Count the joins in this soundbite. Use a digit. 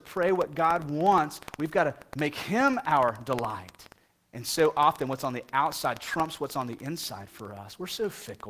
1